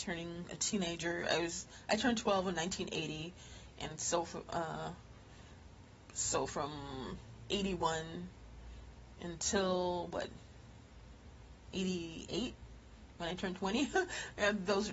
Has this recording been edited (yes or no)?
no